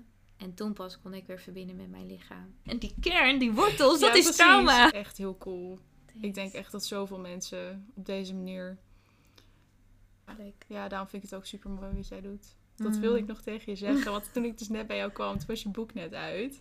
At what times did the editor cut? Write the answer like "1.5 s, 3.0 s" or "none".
2.6 s, 4.9 s, 10.3 s